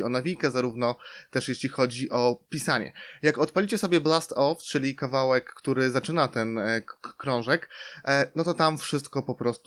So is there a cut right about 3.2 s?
no; 0 cuts

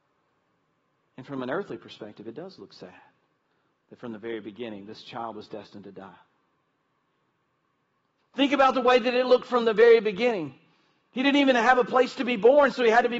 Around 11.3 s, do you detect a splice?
no; 1 cut; at 8.2 s

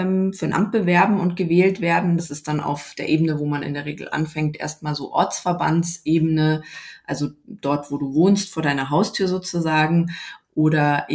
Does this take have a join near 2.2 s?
no; 0 cuts

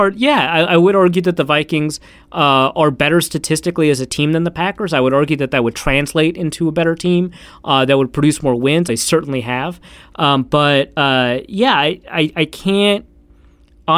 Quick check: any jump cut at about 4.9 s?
no; 1 cut; at 8.9 s

